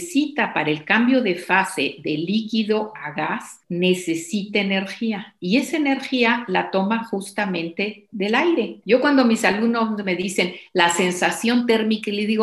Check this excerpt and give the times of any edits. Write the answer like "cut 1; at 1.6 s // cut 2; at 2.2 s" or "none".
cut 1; at 8.8 s